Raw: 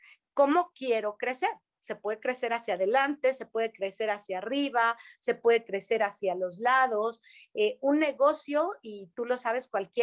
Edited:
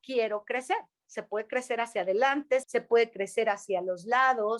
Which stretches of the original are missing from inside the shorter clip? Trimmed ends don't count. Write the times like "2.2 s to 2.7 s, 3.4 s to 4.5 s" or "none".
3.4 s to 5.2 s